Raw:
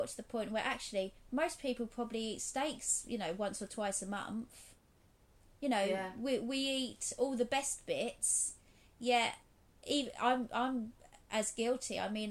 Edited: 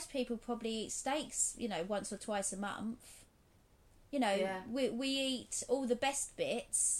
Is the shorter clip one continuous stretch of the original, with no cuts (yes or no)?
yes